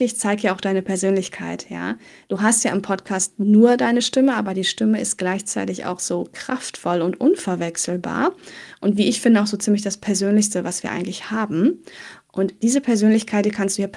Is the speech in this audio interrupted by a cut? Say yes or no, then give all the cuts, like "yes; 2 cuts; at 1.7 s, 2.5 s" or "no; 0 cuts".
no; 0 cuts